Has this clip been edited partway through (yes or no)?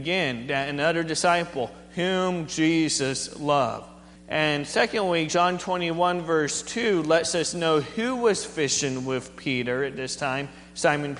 yes